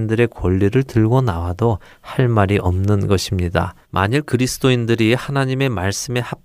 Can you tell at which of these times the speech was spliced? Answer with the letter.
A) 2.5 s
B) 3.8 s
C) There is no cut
B